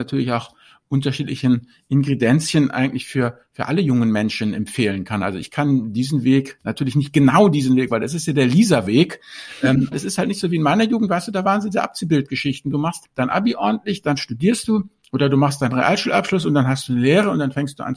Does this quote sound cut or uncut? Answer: cut